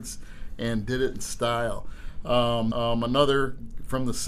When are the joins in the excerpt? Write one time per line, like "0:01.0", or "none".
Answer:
0:02.7